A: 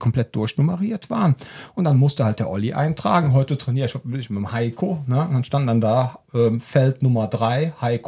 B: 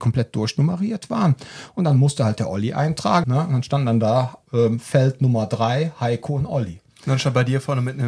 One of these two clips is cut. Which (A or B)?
B